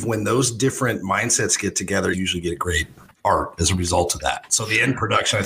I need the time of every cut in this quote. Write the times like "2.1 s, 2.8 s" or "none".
2.1 s